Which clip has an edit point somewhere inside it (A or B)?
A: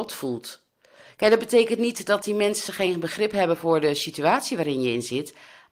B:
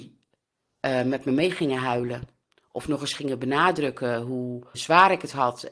B